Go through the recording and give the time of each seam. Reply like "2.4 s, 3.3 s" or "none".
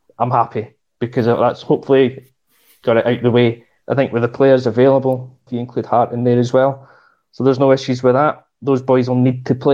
3.8 s, 5.5 s